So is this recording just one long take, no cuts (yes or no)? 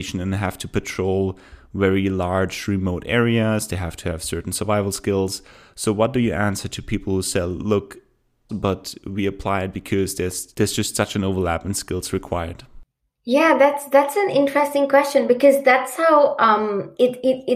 no